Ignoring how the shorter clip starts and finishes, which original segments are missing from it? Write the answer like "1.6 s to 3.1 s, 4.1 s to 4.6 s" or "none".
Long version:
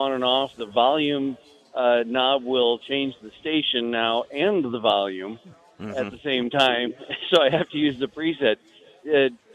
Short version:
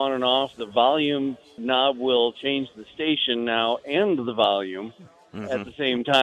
1.6 s to 2.0 s